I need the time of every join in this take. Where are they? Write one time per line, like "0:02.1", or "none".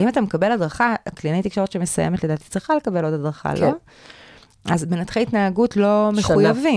0:01.1